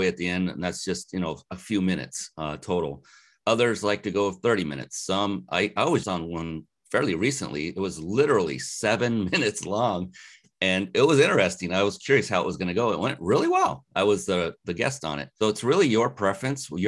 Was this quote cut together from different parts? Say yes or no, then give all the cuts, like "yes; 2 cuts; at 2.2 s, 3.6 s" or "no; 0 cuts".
yes; 2 cuts; at 6.0 s, 15.4 s